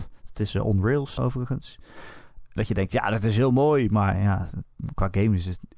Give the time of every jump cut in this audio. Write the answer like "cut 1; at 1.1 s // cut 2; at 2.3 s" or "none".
cut 1; at 1.2 s